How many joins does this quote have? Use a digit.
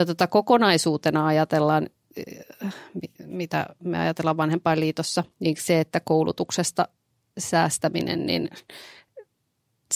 1